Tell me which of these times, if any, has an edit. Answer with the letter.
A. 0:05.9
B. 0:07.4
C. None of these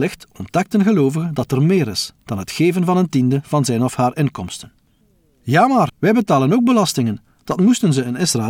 A